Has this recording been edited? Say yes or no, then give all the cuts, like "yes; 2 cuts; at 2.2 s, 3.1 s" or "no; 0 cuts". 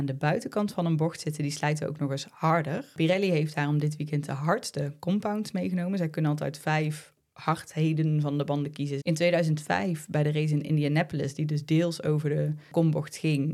yes; 1 cut; at 9.0 s